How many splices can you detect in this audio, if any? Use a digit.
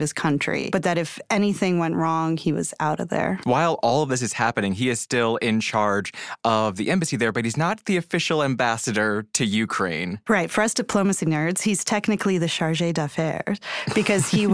0